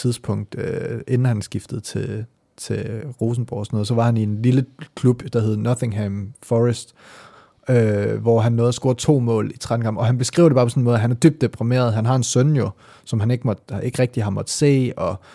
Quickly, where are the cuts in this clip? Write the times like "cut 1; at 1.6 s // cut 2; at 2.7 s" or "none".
none